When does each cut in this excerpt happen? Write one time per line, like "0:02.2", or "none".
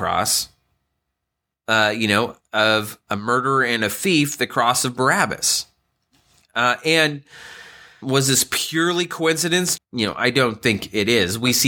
0:08.0
0:09.8